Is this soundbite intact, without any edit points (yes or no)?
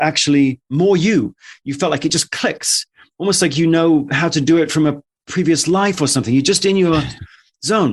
yes